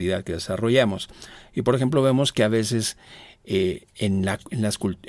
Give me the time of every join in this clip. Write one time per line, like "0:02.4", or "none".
none

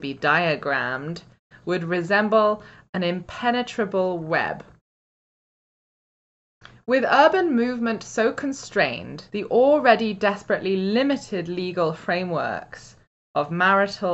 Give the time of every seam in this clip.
0:09.3

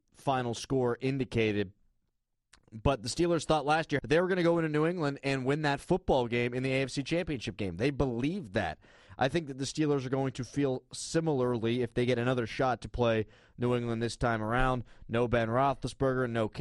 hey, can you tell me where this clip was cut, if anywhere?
0:04.0

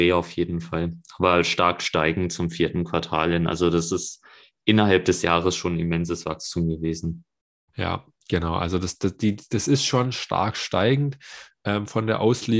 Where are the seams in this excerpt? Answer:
none

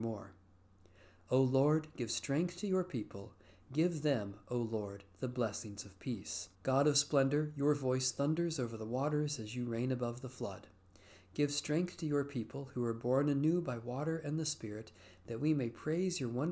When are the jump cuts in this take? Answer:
0:06.5

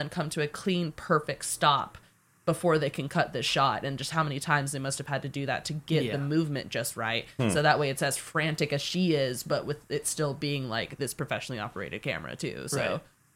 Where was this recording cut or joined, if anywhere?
none

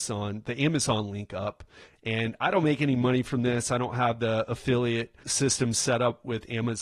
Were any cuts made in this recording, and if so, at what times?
0:05.2

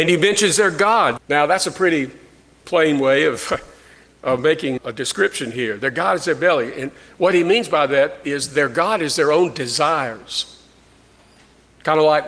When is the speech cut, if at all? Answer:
0:01.2
0:04.8

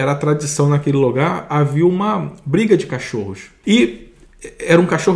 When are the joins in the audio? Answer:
0:03.6

